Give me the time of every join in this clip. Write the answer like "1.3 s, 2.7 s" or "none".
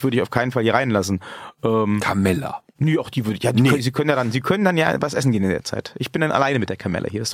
2.7 s